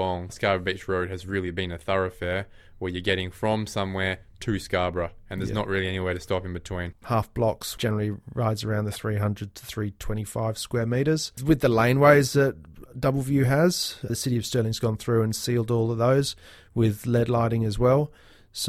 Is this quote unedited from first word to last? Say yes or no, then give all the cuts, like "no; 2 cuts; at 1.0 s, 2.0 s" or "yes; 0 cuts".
no; 2 cuts; at 6.9 s, 14.1 s